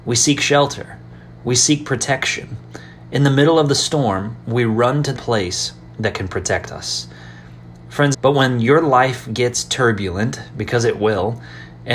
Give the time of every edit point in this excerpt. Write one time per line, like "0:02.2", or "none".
0:05.2
0:08.1